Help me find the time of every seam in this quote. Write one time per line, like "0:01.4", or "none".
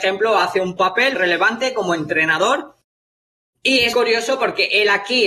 0:01.2
0:03.9